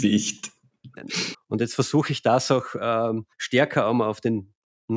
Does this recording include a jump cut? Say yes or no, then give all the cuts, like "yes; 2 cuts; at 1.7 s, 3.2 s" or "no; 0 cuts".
yes; 2 cuts; at 1.3 s, 3.3 s